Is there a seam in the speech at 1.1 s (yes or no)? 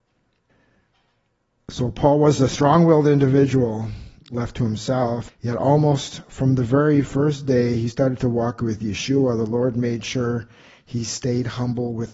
no